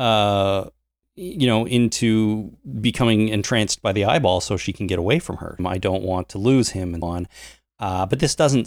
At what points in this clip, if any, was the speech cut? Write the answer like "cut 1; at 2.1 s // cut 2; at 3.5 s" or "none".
cut 1; at 5.6 s // cut 2; at 7.0 s